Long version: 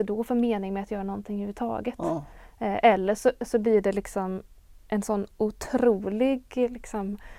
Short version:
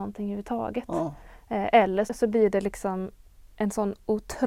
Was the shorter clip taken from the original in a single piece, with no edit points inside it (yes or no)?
no